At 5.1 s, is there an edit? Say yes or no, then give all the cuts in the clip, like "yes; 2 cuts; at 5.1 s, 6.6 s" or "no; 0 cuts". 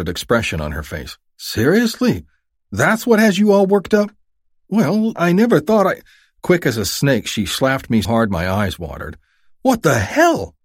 yes; 2 cuts; at 5.1 s, 8.0 s